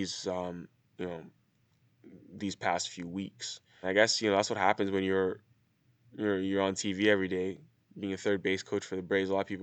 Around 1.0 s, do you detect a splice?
yes; 2 cuts; at 1.0 s, 3.8 s

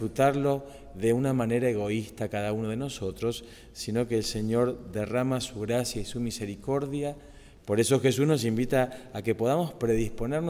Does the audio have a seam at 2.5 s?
no; 1 cut; at 7.6 s

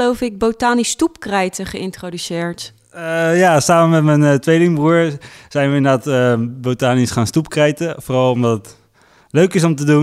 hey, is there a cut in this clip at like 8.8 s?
no; 0 cuts

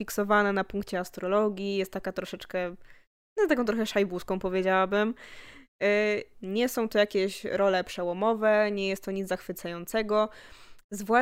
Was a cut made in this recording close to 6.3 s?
yes; 1 cut; at 6.3 s

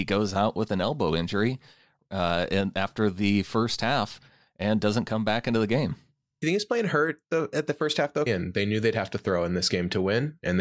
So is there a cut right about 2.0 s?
no; 1 cut; at 8.3 s

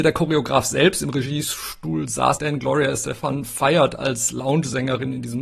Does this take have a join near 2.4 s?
yes; 1 cut; at 2.4 s

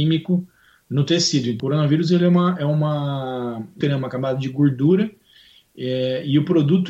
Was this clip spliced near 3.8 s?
yes; 1 cut; at 3.8 s

